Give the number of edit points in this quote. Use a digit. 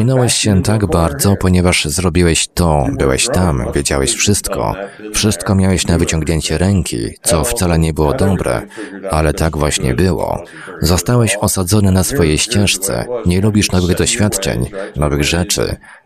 1